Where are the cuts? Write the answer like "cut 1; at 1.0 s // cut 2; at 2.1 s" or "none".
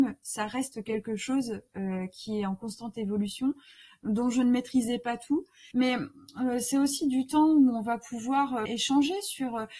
cut 1; at 5.7 s // cut 2; at 8.7 s